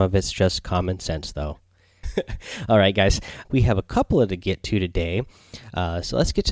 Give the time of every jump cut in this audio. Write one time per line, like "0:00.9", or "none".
0:02.0
0:03.4

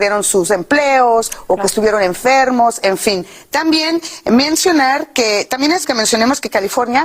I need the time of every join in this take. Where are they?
0:05.8

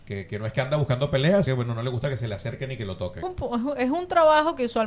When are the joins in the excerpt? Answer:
0:01.5
0:03.2

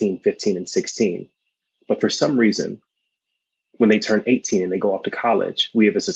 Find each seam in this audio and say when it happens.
none

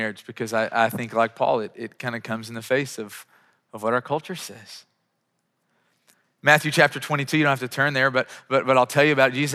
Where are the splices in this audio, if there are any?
none

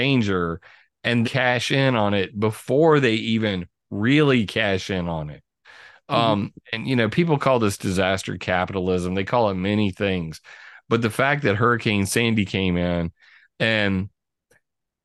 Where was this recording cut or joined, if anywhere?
0:01.2

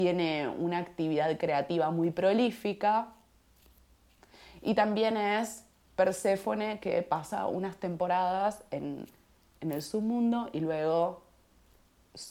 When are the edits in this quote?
none

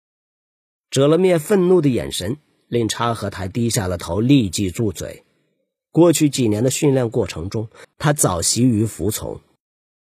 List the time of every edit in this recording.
0:07.8

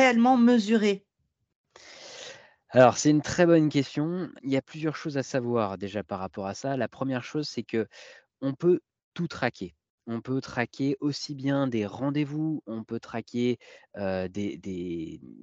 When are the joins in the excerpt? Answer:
0:04.4

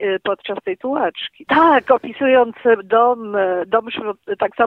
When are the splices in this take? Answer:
0:01.5

